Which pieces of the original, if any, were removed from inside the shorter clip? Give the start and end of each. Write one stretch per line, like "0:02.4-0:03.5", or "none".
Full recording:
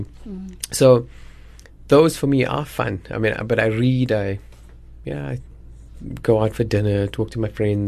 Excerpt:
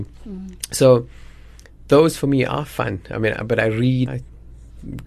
0:04.1-0:05.3